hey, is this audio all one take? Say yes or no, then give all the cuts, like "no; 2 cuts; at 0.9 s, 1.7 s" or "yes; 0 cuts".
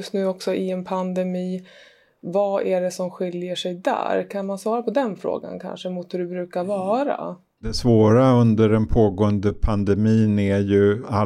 yes; 0 cuts